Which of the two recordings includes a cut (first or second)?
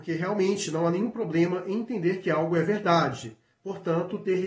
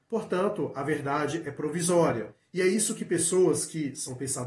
first